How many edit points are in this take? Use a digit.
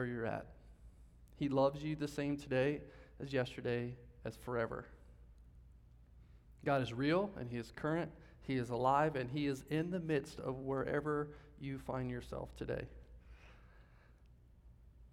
0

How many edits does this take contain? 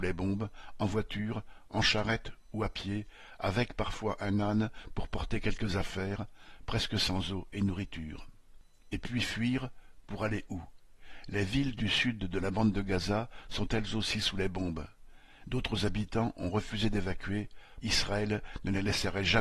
3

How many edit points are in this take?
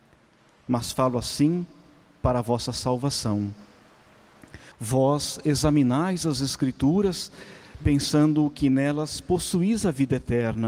1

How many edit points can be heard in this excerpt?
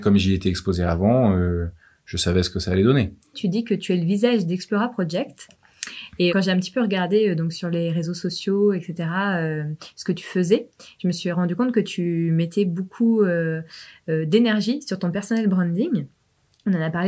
2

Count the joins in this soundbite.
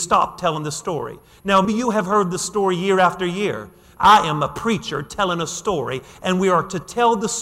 2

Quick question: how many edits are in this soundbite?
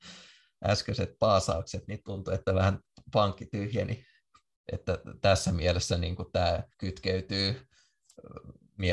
2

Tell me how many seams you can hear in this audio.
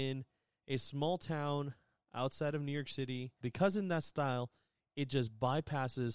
1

